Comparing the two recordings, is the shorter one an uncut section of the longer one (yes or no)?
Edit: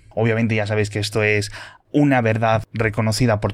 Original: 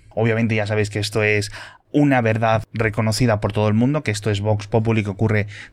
yes